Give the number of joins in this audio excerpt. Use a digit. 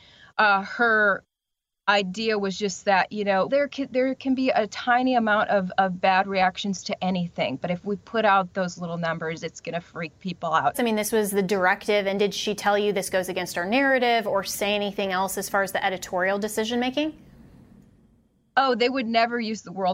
2